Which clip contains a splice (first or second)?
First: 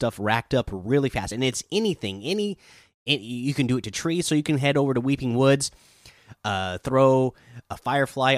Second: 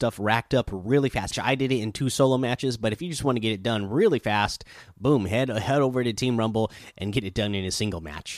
second